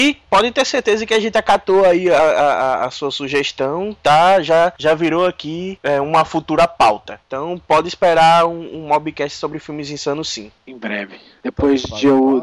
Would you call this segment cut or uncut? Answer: uncut